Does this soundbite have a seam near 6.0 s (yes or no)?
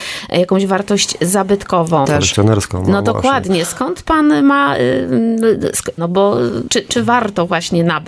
yes